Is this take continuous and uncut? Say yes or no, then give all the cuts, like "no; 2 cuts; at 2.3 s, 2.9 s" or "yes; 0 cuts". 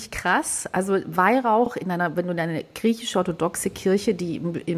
yes; 0 cuts